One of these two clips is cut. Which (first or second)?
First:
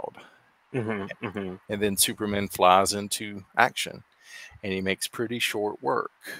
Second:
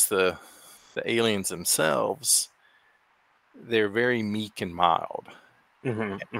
first